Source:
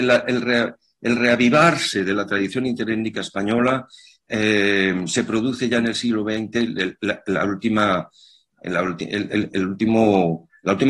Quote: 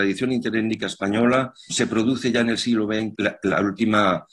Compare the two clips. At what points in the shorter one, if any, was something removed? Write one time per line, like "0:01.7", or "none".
0:01.7
0:03.1